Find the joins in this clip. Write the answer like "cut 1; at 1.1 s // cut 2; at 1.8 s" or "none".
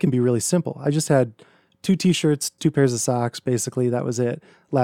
cut 1; at 2.6 s